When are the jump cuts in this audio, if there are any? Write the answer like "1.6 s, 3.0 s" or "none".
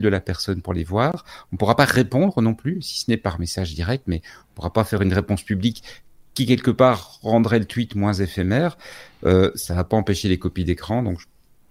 none